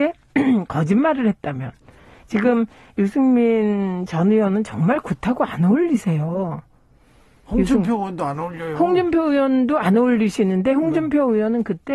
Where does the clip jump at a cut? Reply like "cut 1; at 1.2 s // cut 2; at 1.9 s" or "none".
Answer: none